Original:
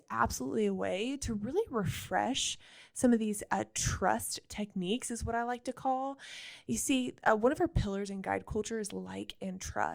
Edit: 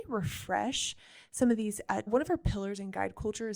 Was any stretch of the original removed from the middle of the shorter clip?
yes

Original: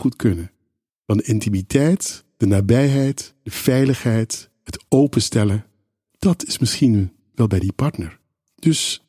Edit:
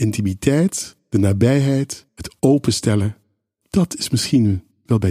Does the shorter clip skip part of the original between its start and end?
yes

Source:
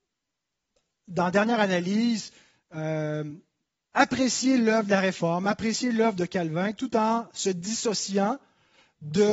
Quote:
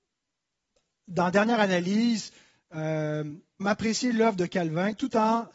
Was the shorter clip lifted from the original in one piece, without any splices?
no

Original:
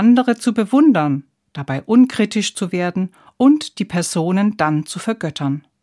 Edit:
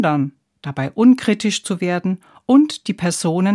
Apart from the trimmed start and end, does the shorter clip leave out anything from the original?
no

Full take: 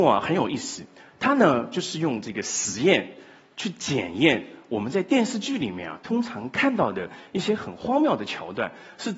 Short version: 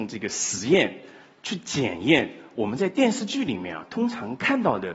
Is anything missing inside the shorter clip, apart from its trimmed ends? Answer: no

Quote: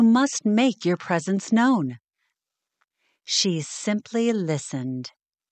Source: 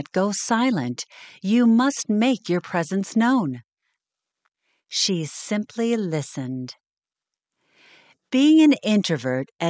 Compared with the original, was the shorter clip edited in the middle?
no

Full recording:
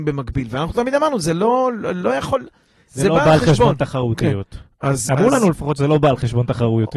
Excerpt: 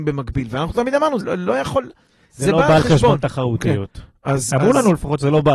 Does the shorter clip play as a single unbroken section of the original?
no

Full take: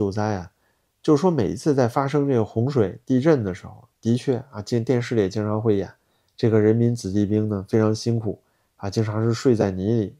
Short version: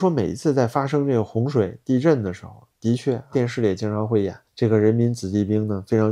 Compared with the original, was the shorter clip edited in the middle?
yes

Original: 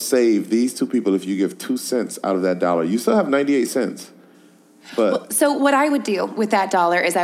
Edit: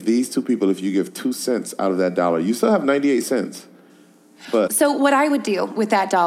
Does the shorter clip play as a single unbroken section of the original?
no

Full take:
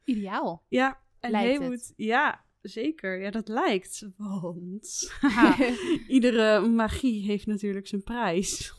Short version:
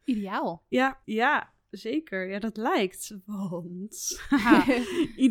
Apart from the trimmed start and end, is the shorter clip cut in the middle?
yes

